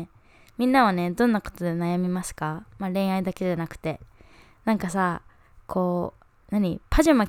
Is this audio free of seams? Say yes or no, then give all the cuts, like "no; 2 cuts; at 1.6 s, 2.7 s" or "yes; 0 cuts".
yes; 0 cuts